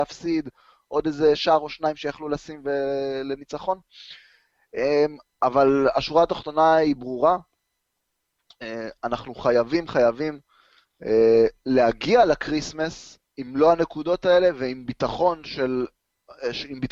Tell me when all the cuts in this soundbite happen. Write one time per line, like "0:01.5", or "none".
0:09.9
0:13.3